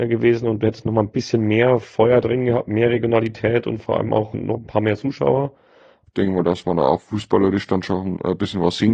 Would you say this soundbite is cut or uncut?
cut